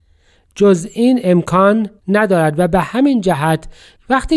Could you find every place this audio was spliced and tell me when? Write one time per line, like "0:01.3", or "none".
0:02.0